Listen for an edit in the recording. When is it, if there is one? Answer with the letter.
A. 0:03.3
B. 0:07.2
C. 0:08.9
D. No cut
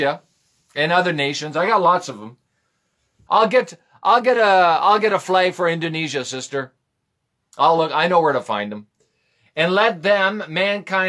A